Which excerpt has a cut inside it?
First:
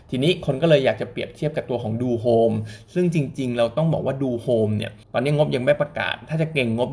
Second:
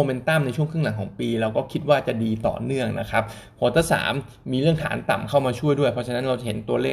first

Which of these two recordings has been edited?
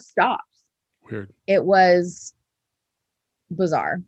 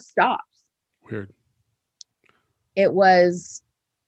first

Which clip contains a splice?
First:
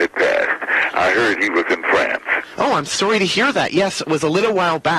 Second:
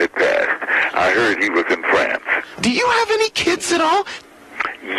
second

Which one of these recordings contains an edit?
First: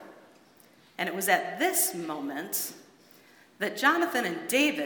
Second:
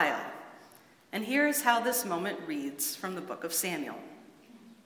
second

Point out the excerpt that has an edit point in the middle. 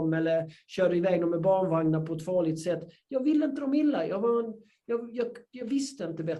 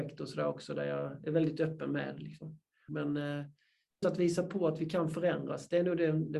second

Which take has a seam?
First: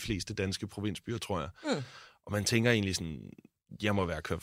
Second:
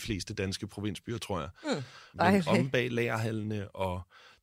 second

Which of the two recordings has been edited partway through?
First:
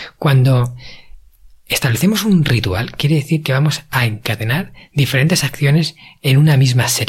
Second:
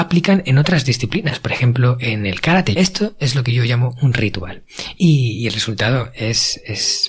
second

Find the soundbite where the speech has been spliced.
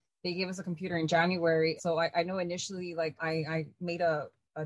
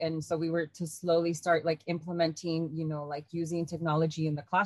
first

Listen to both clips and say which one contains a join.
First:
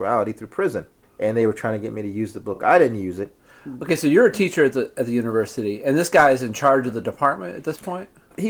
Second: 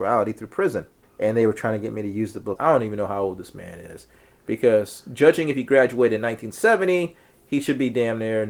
second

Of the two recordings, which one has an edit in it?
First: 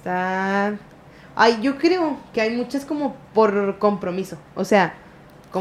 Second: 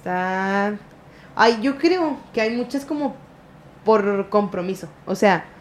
first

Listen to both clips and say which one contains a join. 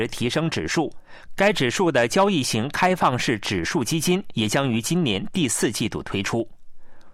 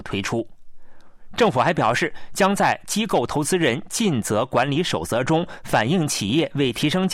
first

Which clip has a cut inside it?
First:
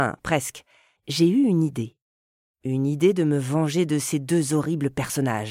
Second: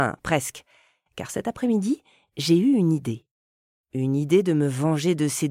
first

